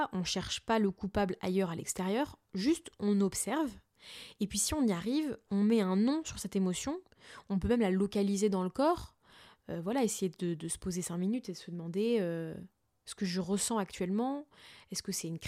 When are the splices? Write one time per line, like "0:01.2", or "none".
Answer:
none